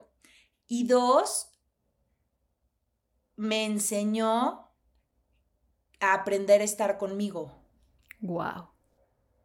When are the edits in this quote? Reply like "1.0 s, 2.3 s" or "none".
none